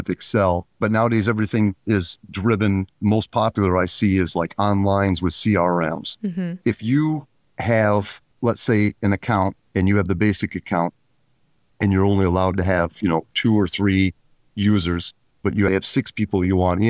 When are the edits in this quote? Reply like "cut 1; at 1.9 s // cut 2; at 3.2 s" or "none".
cut 1; at 6.6 s // cut 2; at 15.7 s